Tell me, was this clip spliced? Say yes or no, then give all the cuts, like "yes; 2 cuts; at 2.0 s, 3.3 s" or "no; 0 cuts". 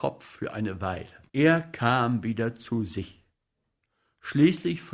yes; 1 cut; at 1.3 s